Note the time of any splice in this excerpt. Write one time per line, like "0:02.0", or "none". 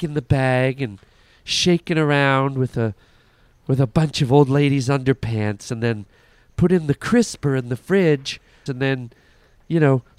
0:08.7